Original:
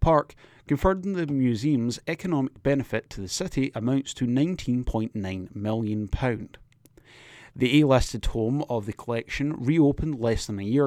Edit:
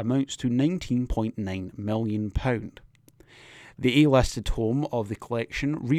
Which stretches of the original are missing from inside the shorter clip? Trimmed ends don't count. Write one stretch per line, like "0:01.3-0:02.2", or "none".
none